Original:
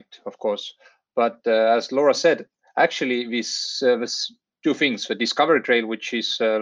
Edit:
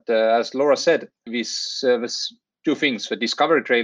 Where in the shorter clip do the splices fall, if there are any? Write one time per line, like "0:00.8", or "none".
0:01.3